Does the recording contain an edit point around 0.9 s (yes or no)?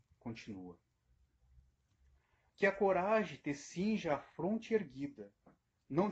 no